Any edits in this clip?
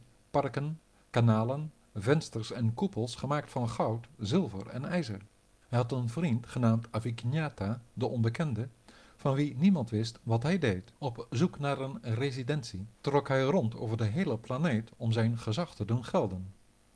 yes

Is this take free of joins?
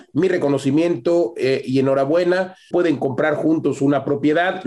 no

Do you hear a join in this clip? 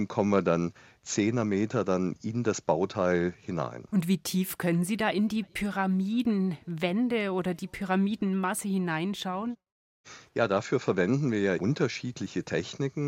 yes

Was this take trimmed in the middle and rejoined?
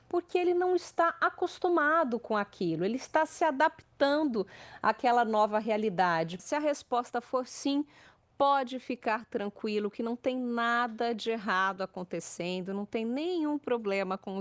yes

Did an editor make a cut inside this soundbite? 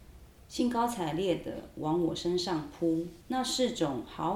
yes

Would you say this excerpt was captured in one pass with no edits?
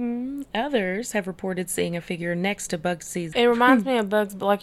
no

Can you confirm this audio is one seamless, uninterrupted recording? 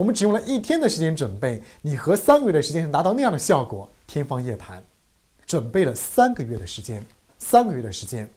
no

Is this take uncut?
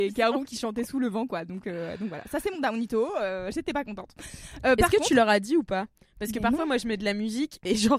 yes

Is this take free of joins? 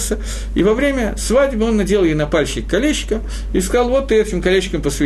yes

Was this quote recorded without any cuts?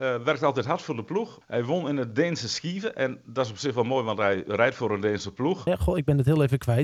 no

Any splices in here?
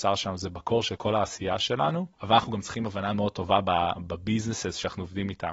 yes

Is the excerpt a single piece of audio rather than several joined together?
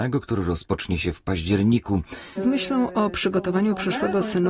no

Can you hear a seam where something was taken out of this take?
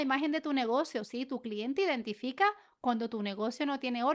no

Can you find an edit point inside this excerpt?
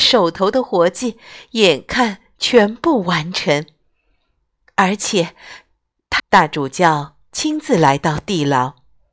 yes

